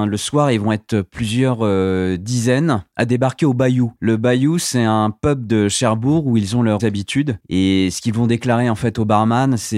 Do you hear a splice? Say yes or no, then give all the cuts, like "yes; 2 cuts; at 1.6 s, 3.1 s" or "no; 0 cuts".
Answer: yes; 1 cut; at 6.8 s